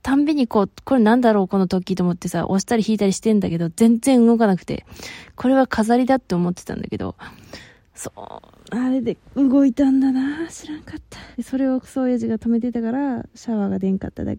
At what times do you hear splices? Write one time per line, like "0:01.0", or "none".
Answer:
0:11.3

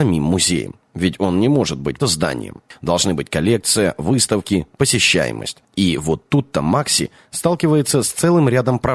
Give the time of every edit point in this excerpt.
0:02.0

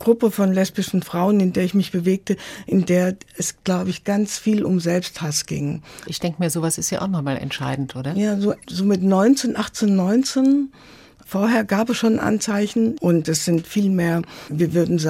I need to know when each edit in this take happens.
0:06.1
0:13.0

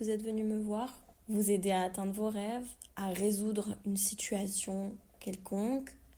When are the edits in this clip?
0:01.1
0:02.9

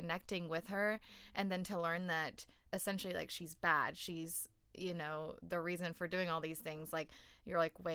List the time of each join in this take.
none

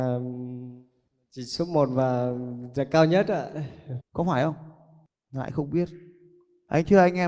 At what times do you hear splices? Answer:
0:04.0

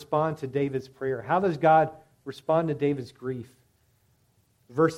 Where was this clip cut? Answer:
none

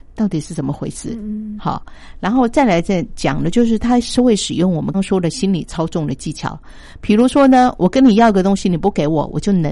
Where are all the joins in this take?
0:01.6
0:04.9

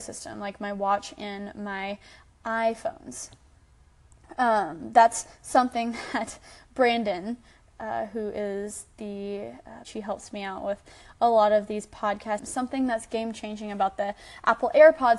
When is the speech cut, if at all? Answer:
0:09.8
0:12.4

